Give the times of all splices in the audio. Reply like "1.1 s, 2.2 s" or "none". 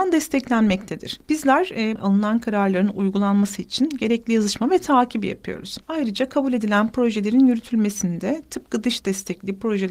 2.0 s